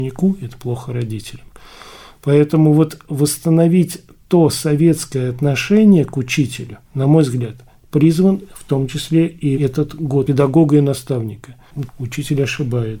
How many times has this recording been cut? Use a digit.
3